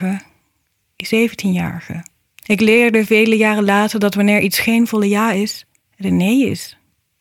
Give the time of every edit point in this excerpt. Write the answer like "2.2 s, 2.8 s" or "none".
2.3 s